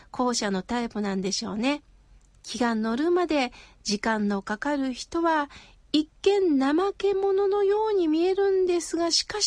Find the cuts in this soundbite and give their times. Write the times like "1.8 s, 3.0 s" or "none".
none